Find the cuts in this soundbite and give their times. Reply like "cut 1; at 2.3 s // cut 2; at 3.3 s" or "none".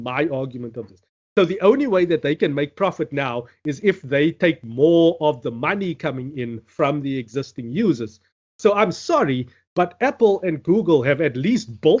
none